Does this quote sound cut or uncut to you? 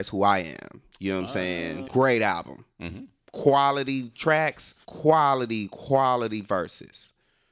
cut